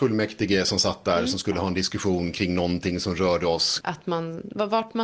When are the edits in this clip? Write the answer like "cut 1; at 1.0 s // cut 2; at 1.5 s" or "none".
cut 1; at 3.8 s